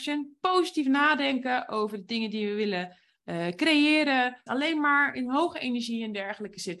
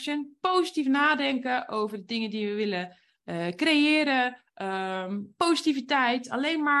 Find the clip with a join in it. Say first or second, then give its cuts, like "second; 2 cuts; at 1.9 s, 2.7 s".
first; 1 cut; at 4.5 s